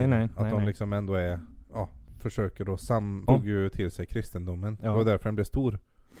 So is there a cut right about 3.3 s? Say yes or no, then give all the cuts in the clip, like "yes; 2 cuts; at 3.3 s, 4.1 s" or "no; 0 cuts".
yes; 2 cuts; at 1.7 s, 3.3 s